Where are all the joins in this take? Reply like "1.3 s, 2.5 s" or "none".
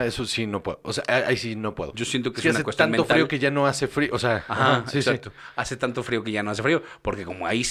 1.9 s